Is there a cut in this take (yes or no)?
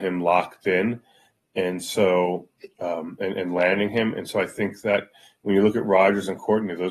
no